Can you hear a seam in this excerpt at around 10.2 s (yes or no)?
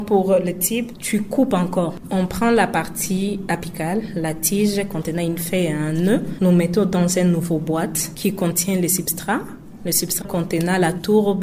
yes